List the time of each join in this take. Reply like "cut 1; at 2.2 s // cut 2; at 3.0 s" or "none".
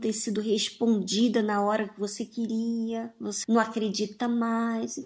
cut 1; at 3.4 s